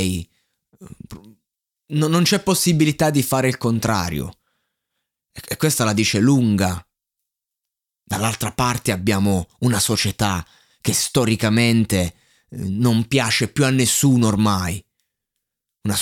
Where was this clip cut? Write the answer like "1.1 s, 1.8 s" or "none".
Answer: none